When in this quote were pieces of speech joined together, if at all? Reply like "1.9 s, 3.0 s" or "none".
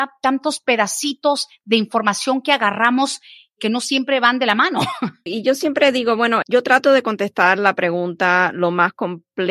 5.3 s, 6.4 s